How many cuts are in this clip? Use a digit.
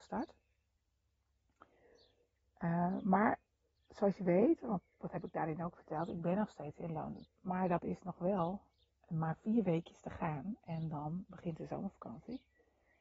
1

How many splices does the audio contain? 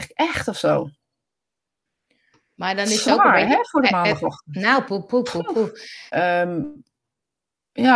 2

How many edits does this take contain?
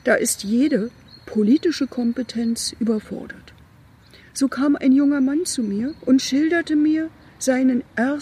1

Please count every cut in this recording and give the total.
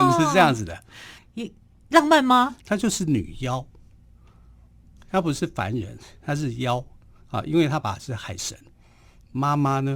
3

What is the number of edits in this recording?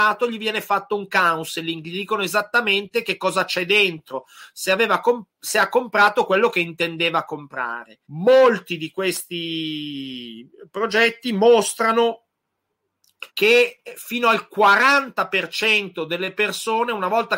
2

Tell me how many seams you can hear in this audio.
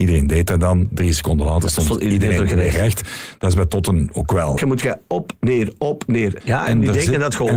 2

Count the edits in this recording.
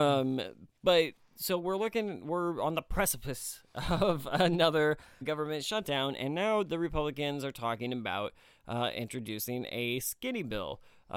1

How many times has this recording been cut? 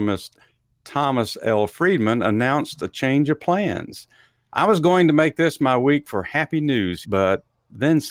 1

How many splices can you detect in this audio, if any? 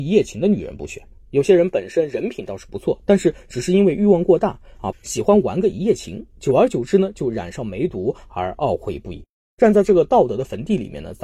1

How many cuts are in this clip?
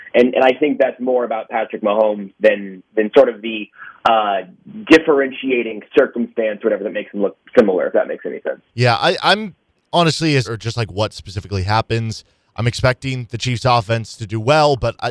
2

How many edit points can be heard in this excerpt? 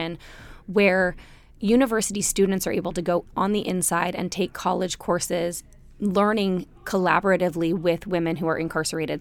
1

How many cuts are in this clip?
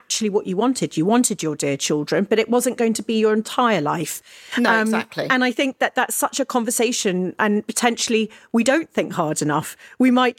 0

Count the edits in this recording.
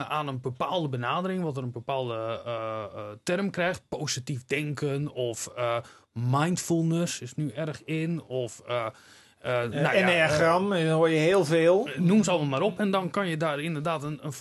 0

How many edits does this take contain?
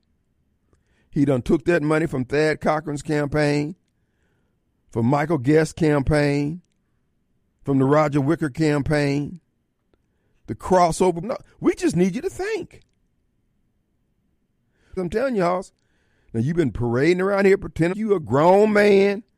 3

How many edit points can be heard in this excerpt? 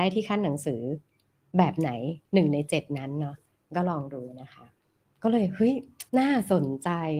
1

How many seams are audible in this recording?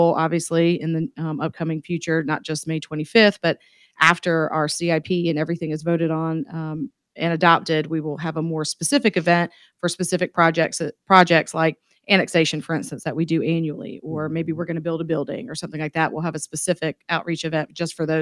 0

